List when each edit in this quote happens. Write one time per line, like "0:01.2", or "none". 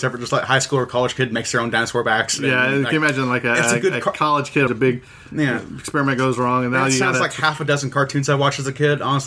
0:04.7